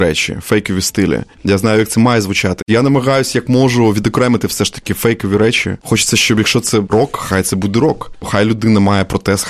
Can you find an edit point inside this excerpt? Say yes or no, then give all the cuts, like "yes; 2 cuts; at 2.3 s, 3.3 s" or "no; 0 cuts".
yes; 2 cuts; at 1.4 s, 2.6 s